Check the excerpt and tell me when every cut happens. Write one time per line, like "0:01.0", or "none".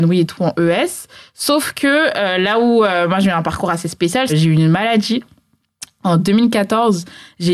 0:04.3